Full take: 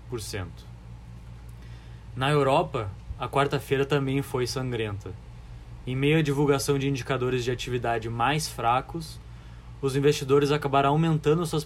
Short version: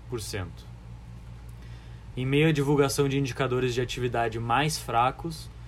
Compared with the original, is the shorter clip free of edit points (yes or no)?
no